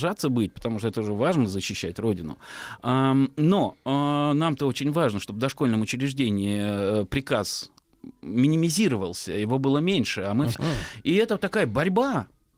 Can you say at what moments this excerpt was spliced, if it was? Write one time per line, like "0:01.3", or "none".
0:10.5